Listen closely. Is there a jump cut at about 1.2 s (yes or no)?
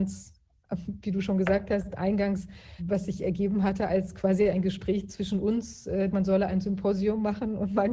no